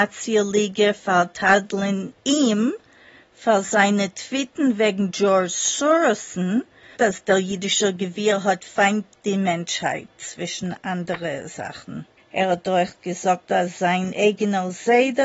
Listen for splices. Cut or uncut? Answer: cut